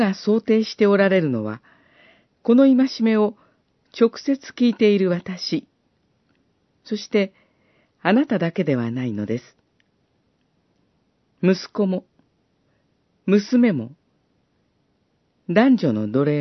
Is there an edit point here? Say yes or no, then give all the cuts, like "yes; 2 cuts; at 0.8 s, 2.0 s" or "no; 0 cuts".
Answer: no; 0 cuts